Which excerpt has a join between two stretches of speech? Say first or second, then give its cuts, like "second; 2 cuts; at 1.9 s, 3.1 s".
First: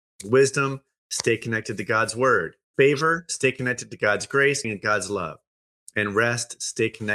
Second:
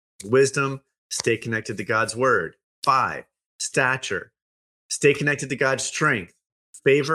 first; 2 cuts; at 2.7 s, 4.6 s